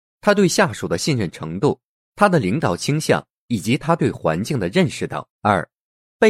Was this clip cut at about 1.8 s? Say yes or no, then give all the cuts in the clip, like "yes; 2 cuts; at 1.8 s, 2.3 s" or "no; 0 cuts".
no; 1 cut; at 5.3 s